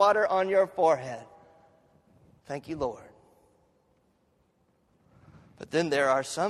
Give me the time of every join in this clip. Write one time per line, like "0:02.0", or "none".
0:02.4